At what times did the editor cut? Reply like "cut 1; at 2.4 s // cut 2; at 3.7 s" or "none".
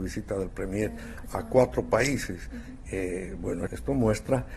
cut 1; at 3.7 s